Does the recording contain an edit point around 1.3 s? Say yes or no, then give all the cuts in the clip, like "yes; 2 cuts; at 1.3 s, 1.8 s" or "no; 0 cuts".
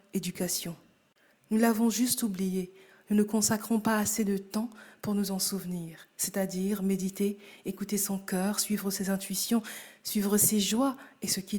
yes; 1 cut; at 1.3 s